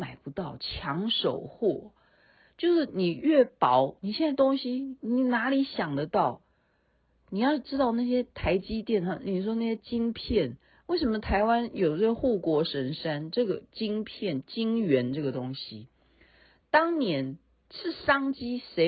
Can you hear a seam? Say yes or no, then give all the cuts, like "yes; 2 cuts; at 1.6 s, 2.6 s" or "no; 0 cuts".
no; 0 cuts